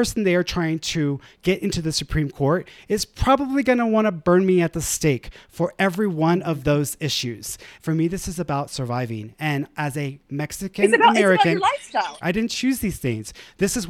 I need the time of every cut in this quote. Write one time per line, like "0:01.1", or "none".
0:07.7
0:12.2